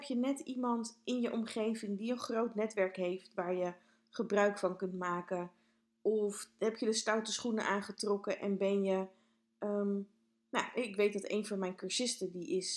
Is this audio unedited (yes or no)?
yes